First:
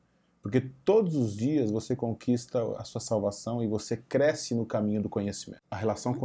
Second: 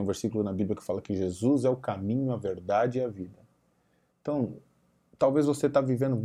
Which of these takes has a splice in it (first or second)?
second